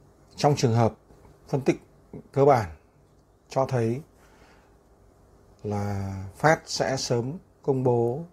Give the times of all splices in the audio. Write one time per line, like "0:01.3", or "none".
none

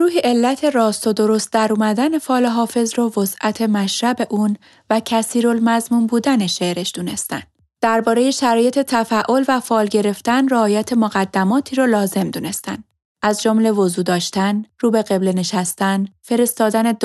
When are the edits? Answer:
none

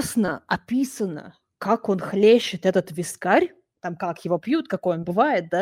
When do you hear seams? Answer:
0:03.7

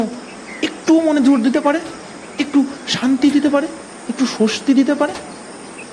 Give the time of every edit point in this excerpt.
none

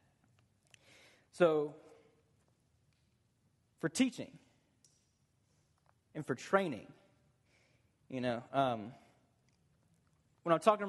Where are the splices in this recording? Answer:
none

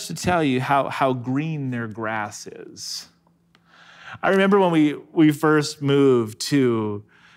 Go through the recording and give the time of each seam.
none

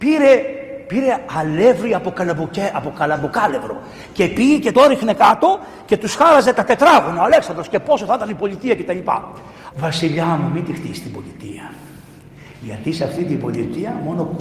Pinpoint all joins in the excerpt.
0:04.7
0:09.7

